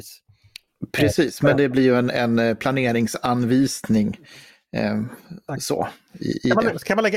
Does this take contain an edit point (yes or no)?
no